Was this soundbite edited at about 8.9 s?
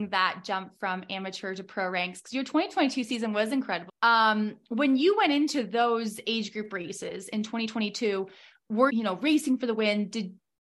yes; 2 cuts; at 3.9 s, 8.9 s

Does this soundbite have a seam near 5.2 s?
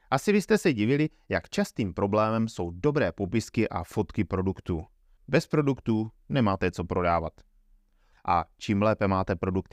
yes; 2 cuts; at 5.2 s, 8.1 s

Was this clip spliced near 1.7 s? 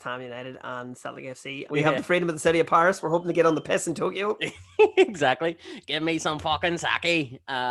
yes; 1 cut; at 1.7 s

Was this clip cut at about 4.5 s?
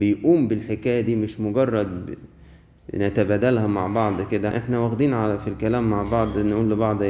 yes; 1 cut; at 4.5 s

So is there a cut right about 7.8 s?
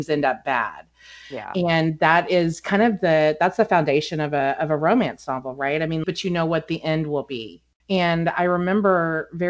yes; 2 cuts; at 6.0 s, 7.8 s

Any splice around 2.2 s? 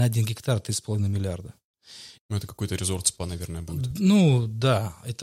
yes; 1 cut; at 2.2 s

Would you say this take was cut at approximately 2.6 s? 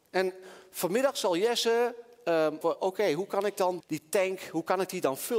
yes; 2 cuts; at 2.6 s, 3.8 s

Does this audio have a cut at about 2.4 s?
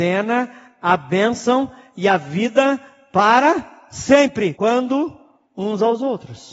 no; 1 cut; at 4.6 s

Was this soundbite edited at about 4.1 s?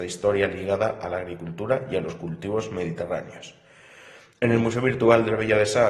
no; 0 cuts

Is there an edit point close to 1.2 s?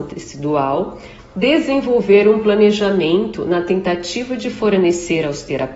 yes; 1 cut; at 1.2 s

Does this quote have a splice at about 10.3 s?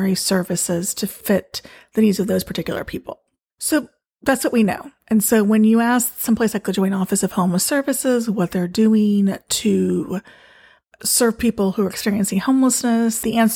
no; 1 cut; at 3.5 s

